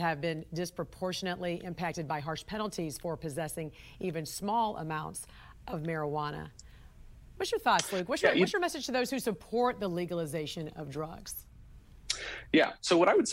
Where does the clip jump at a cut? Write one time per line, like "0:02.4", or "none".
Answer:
none